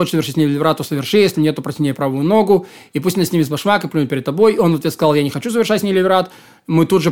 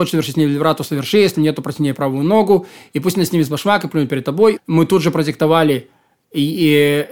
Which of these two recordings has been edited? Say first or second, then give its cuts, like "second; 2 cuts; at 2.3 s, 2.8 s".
second; 1 cut; at 4.6 s